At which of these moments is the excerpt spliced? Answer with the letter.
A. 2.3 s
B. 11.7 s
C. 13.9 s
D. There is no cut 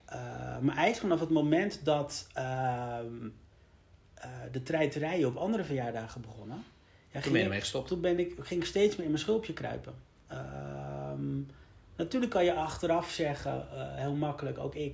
D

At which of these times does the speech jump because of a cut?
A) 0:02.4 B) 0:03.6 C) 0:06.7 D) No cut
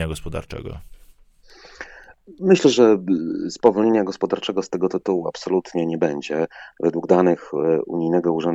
C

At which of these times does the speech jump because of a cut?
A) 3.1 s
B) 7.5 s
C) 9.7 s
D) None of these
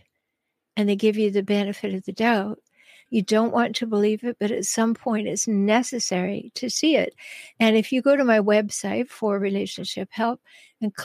A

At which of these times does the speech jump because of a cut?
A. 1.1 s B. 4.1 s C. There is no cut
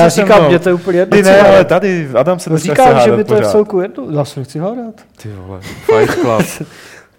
A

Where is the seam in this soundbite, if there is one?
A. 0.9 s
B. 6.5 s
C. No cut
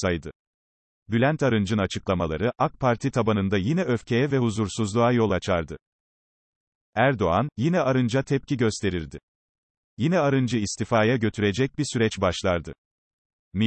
C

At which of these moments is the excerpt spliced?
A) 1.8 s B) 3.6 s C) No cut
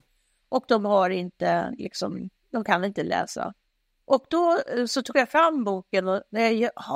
C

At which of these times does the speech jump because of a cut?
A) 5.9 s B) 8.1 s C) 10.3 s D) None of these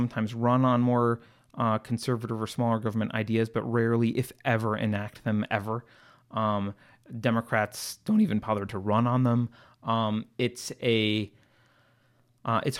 D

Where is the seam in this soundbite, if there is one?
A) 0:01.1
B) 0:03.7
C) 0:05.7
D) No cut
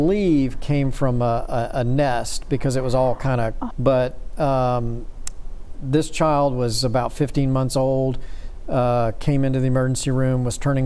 B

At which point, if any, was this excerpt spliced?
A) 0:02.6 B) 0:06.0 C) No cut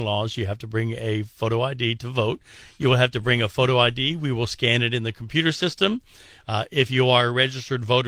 C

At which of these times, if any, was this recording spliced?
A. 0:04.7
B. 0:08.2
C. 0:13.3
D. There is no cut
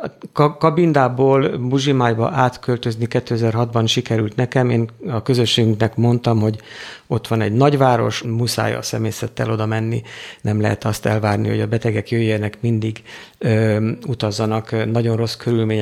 B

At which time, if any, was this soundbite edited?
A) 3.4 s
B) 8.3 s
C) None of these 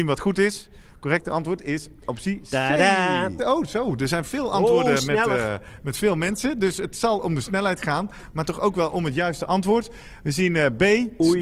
A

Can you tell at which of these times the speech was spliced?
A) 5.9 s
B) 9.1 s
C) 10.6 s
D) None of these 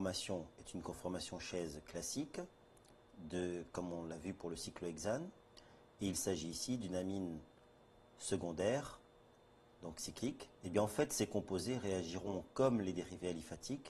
C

